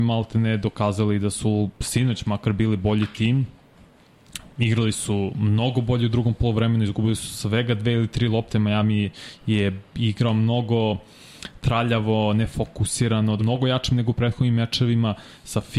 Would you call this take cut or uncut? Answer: cut